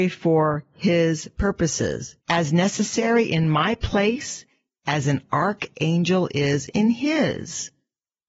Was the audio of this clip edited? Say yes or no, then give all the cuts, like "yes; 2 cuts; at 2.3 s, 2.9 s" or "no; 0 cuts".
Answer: yes; 1 cut; at 2.2 s